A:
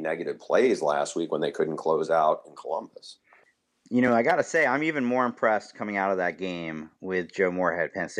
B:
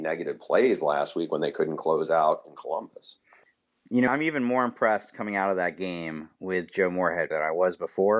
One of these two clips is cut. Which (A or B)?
B